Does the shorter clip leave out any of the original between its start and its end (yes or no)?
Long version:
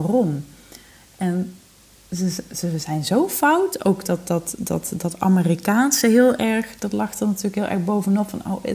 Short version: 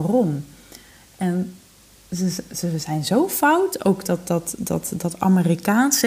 no